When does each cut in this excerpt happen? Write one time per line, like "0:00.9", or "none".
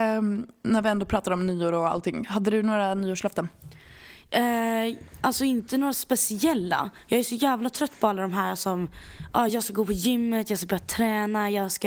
none